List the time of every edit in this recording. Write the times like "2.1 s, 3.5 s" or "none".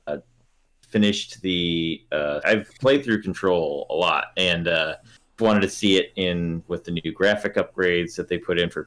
2.4 s, 5.4 s